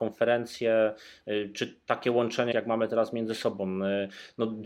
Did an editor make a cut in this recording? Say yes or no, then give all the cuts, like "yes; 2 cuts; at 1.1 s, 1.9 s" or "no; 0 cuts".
yes; 1 cut; at 2.5 s